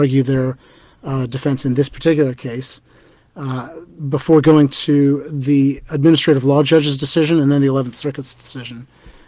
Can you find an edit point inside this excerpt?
no; 0 cuts

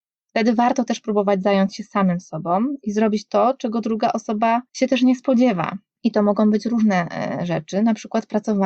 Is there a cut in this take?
no; 0 cuts

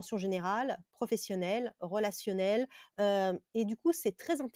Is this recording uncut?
no; 1 cut; at 1.8 s

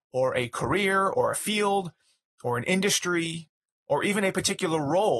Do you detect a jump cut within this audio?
no; 0 cuts

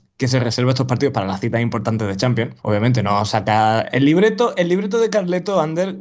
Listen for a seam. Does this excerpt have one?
yes; 1 cut; at 2.6 s

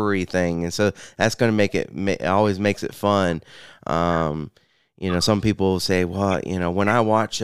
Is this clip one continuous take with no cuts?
yes; 0 cuts

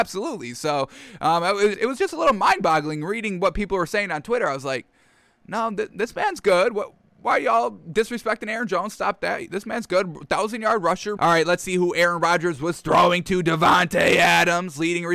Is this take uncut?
no; 2 cuts; at 1.7 s, 11.2 s

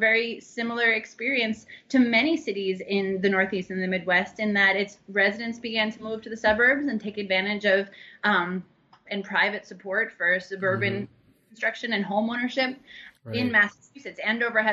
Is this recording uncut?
no; 2 cuts; at 9.1 s, 13.1 s

